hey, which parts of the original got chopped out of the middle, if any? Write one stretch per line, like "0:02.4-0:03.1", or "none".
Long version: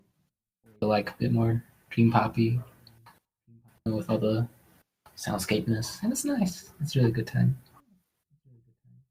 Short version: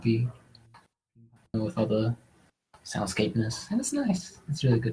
none